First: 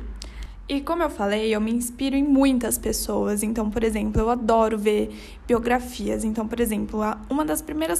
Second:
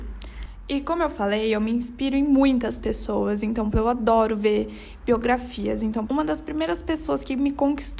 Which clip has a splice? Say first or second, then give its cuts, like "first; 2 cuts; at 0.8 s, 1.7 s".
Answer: second; 2 cuts; at 3.7 s, 6.1 s